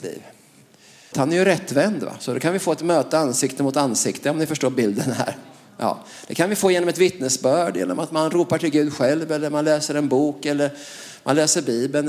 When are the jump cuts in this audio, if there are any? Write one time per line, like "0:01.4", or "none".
0:01.1